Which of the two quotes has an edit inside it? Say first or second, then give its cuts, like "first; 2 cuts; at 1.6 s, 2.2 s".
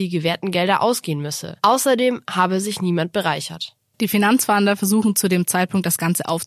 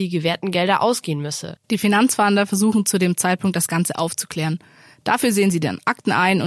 second; 1 cut; at 1.6 s